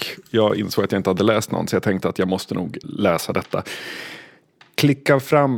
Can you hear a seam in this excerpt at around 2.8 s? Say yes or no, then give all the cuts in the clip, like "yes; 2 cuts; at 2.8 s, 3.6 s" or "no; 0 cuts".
yes; 1 cut; at 2.8 s